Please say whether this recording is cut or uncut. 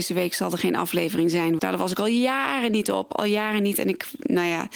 cut